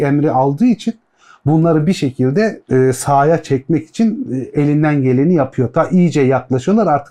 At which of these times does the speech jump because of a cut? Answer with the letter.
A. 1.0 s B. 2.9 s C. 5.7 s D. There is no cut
D